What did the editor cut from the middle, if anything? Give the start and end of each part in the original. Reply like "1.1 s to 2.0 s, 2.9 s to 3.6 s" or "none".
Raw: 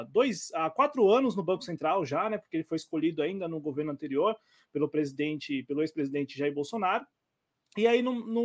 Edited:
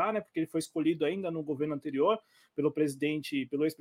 none